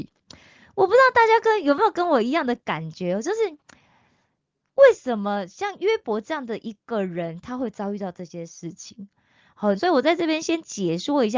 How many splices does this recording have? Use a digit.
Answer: 1